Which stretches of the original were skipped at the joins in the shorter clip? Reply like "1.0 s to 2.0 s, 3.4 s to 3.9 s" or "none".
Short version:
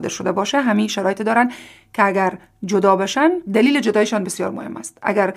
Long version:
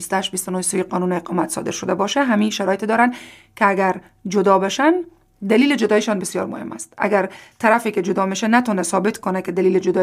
5.1 s to 5.4 s